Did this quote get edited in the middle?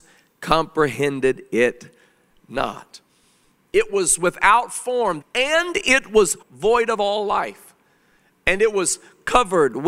yes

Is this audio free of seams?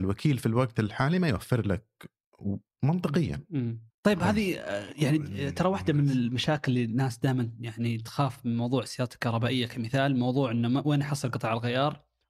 no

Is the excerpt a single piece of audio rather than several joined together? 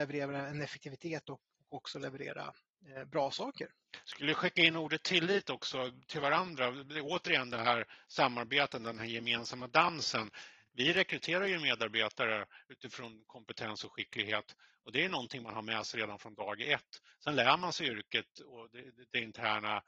yes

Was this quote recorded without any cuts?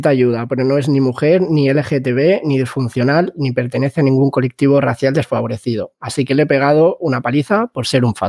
yes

